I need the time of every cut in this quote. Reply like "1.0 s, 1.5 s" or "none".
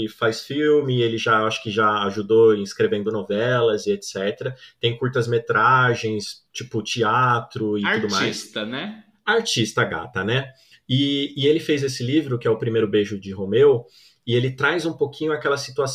6.5 s